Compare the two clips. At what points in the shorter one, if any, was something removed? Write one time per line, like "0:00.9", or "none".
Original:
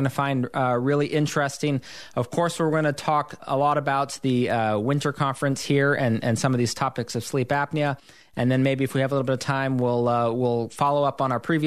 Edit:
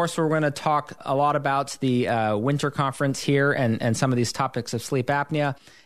none